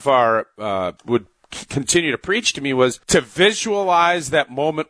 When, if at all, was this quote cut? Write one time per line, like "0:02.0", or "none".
0:01.0
0:03.0